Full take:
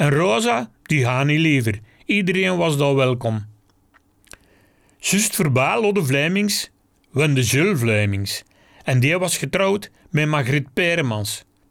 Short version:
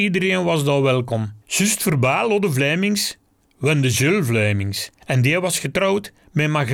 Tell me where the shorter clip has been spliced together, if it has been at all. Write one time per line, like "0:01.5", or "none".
0:01.4
0:05.0